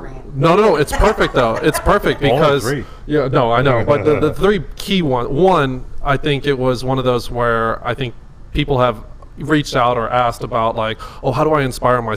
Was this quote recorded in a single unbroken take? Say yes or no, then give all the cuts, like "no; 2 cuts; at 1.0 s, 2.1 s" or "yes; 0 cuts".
yes; 0 cuts